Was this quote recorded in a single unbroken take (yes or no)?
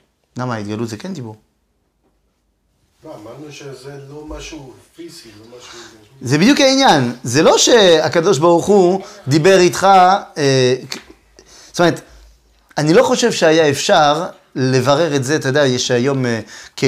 yes